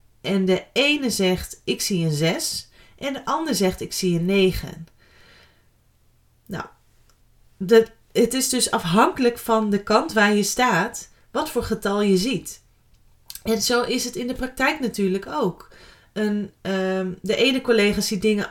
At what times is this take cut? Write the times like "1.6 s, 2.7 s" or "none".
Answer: none